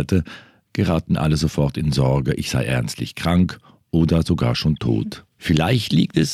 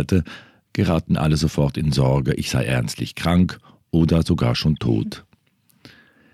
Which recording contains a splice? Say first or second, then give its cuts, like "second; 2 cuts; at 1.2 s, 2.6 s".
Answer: first; 1 cut; at 5.3 s